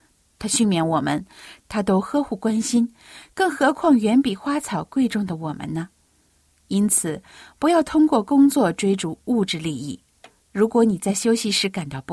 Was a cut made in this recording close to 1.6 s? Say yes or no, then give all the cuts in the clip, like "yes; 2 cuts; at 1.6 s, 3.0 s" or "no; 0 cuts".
yes; 1 cut; at 1.6 s